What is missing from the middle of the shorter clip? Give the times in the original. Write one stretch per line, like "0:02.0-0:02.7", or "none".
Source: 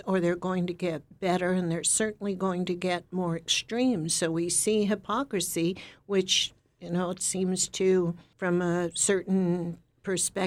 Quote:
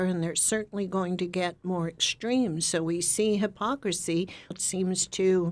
0:06.0-0:07.1